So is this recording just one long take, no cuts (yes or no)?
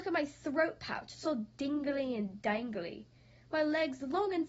yes